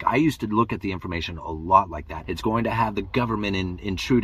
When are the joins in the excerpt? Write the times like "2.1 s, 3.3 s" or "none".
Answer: 2.2 s